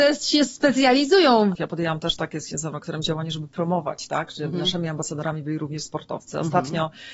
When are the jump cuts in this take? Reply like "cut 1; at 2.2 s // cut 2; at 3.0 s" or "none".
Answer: cut 1; at 1.6 s